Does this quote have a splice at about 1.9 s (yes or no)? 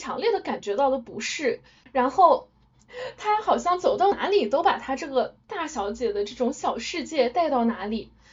yes